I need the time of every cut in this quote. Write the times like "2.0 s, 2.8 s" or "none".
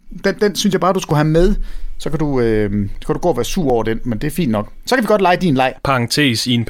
none